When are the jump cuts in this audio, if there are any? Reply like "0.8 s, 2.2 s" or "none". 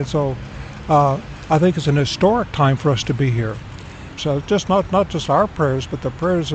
4.2 s